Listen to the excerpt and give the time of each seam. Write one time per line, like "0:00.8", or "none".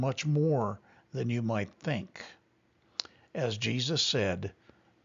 none